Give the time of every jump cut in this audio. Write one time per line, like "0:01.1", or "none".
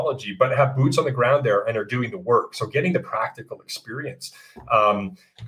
none